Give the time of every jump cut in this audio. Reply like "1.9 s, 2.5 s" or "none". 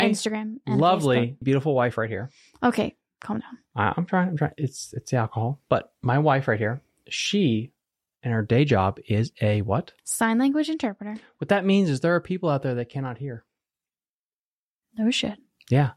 1.4 s